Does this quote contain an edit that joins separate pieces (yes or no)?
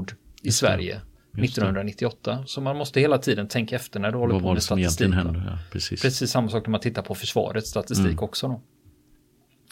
no